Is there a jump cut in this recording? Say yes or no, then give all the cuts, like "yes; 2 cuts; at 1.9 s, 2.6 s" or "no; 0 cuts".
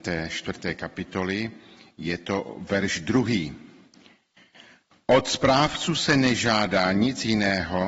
no; 0 cuts